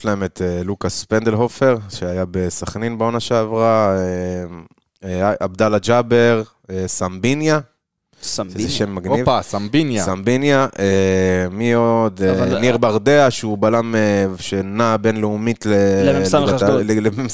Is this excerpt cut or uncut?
uncut